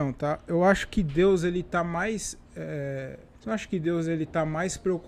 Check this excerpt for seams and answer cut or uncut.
cut